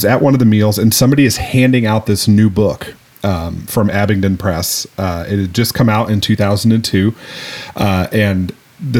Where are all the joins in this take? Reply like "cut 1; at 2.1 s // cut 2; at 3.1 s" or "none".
none